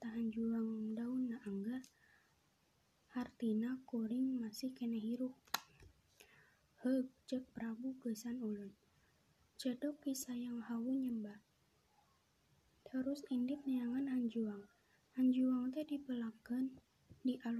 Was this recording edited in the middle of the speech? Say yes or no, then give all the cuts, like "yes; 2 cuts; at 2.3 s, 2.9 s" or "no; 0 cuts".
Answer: no; 0 cuts